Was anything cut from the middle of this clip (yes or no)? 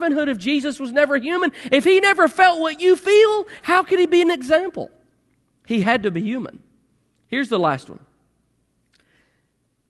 yes